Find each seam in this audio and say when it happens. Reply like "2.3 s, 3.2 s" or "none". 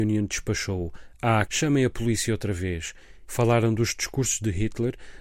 1.5 s, 3.3 s

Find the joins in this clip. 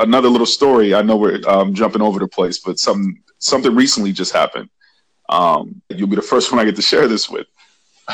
5.9 s

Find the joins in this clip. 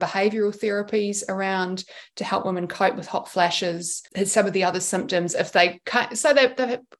none

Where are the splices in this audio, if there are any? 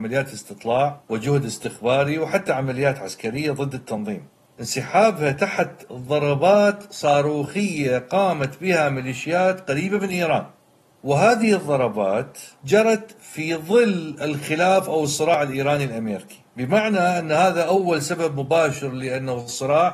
16.5 s

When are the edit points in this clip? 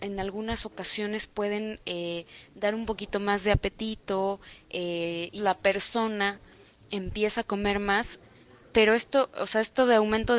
5.4 s

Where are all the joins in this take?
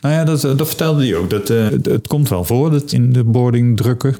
1.7 s, 2.9 s

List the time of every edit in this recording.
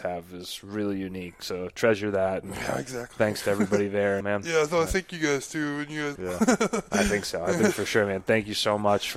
4.2 s, 6.2 s

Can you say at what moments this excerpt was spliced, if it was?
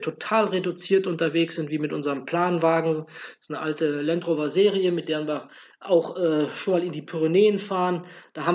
none

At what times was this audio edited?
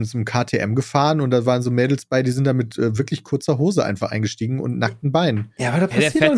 none

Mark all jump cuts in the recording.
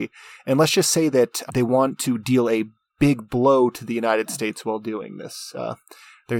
1.5 s

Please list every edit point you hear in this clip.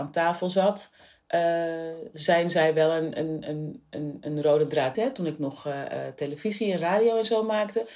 4.9 s

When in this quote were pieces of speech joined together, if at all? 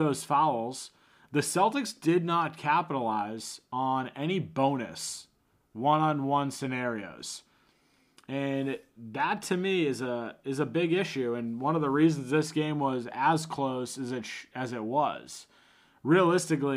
none

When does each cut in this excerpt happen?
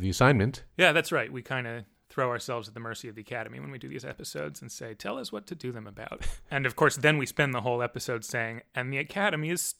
none

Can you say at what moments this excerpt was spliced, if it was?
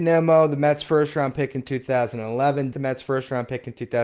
2.7 s

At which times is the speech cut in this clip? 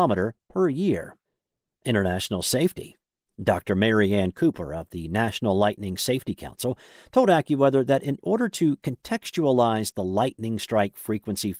none

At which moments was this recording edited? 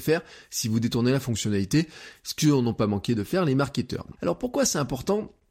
4.2 s

